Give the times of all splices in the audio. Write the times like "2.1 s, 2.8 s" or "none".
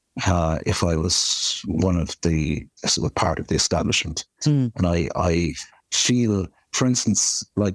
none